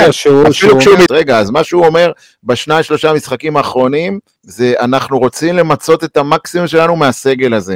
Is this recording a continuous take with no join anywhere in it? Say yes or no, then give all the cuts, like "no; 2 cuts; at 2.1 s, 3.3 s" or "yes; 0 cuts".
no; 2 cuts; at 1.1 s, 4.4 s